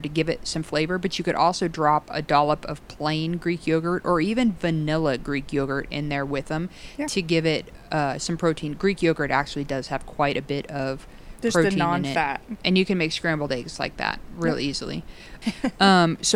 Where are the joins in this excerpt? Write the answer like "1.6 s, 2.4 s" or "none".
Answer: 12.6 s, 15.4 s

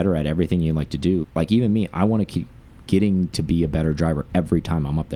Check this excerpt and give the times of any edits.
1.2 s

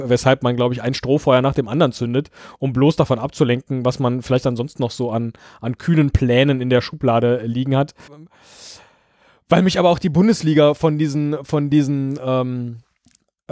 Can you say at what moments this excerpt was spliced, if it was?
8.1 s

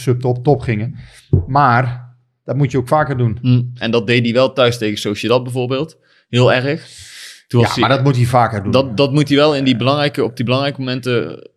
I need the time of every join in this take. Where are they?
3.8 s

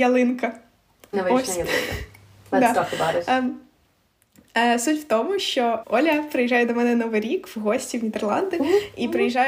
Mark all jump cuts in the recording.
5.8 s

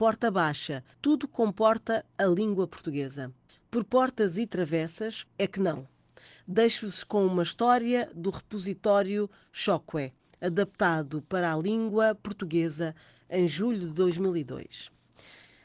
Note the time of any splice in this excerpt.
0.9 s, 5.3 s

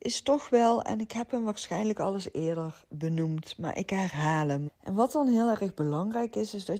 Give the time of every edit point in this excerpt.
4.7 s

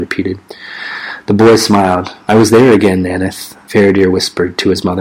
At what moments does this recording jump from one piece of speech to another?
none

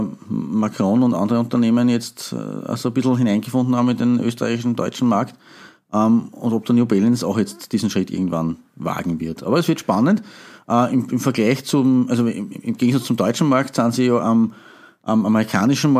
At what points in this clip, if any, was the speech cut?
none

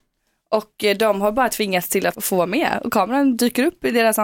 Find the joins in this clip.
2.1 s

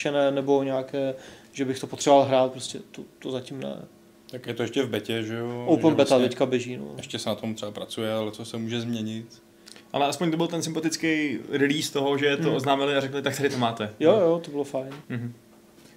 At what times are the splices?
15.0 s

